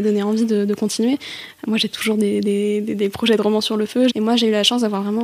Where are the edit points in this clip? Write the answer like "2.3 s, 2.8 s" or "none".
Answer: 4.1 s